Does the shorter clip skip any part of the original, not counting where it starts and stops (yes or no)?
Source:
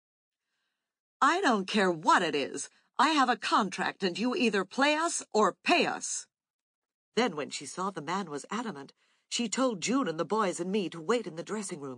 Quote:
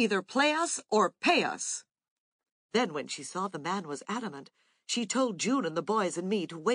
no